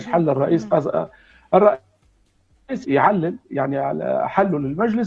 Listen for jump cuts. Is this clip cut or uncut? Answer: cut